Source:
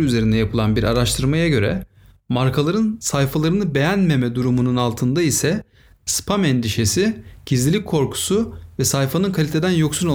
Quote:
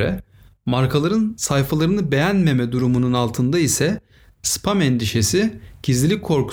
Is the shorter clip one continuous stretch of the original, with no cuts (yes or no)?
yes